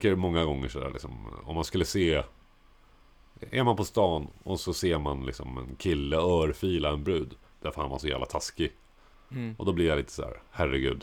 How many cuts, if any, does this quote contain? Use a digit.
2